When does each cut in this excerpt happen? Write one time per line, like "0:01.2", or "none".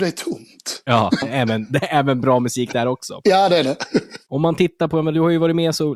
0:01.2